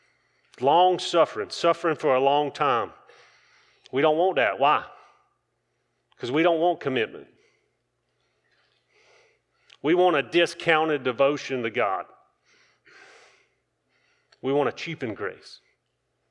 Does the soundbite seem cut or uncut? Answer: uncut